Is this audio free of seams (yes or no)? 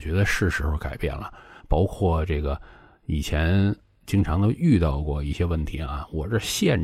yes